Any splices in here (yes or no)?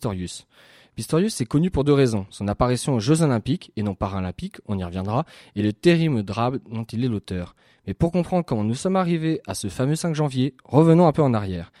no